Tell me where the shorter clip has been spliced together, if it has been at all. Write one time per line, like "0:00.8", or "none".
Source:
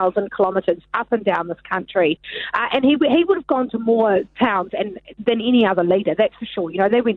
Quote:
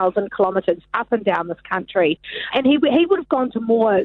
0:02.5